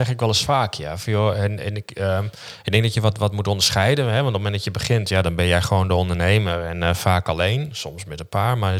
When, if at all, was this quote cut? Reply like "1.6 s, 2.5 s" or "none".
none